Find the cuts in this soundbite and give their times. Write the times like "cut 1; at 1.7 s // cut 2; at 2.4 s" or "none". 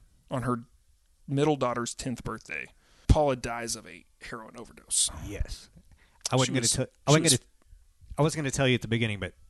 cut 1; at 3.0 s